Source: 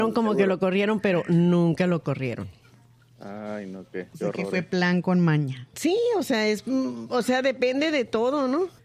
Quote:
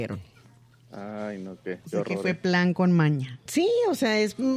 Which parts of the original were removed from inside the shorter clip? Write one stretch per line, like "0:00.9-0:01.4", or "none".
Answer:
none